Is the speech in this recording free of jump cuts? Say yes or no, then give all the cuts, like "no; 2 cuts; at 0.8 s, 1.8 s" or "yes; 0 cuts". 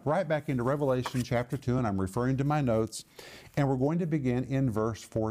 yes; 0 cuts